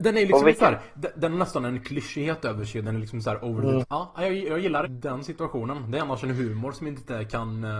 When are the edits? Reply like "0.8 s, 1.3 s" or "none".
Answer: 3.8 s, 4.8 s